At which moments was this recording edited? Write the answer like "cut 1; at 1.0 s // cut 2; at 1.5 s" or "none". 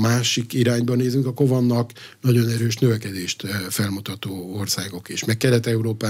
none